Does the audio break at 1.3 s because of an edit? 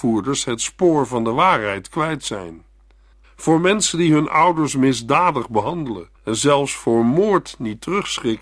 no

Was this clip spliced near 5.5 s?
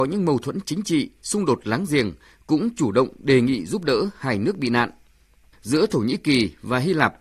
yes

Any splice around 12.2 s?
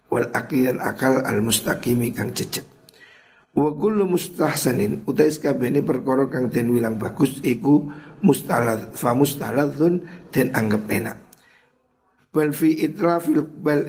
yes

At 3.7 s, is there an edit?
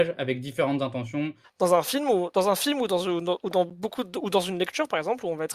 no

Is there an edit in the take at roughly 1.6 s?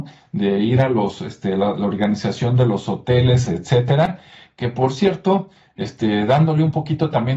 no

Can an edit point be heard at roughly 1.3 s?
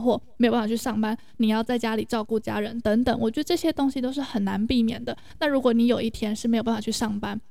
yes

